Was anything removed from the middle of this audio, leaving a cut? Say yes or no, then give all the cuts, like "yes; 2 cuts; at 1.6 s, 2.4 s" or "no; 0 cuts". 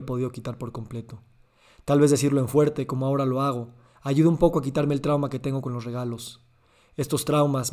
no; 0 cuts